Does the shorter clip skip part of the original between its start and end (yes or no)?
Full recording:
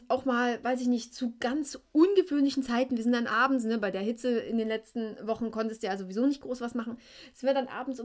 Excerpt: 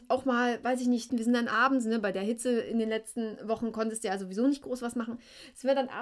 yes